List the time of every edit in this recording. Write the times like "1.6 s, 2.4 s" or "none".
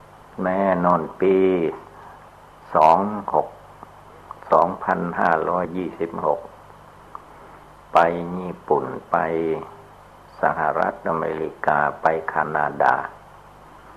none

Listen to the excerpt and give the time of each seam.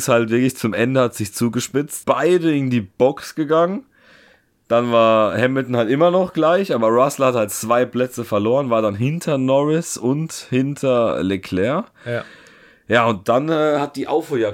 2.0 s

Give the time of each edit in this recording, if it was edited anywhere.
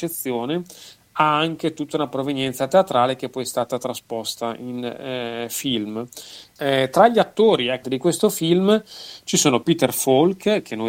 6.6 s, 7.8 s

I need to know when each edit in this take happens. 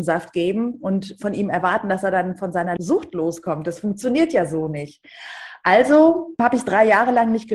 none

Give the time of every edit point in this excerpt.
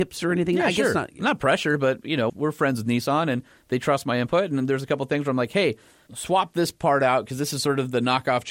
2.3 s

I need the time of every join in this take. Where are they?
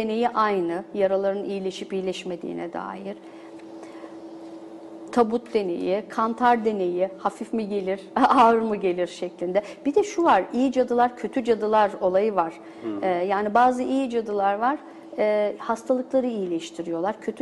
none

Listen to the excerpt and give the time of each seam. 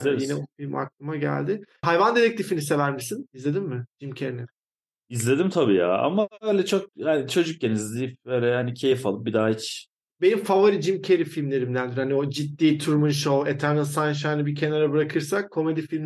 none

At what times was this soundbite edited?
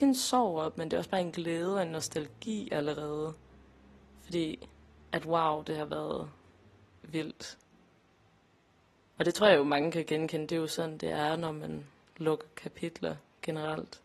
none

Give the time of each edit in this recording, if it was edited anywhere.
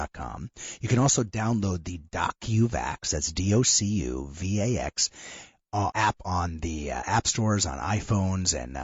5.9 s

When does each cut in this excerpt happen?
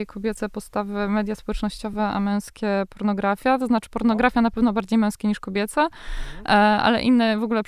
none

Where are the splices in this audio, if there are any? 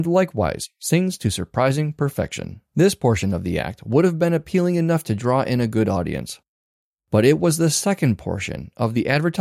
2.7 s

